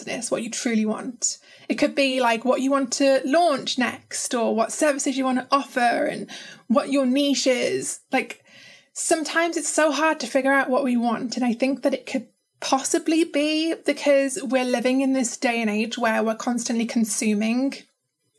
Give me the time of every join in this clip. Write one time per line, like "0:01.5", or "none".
none